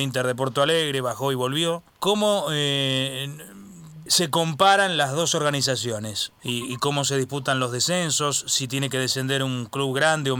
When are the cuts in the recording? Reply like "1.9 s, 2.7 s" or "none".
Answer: 1.9 s, 4.1 s, 6.4 s